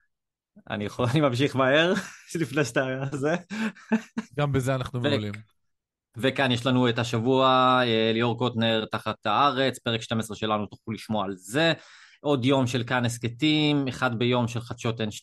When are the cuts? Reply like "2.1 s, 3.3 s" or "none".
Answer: 4.3 s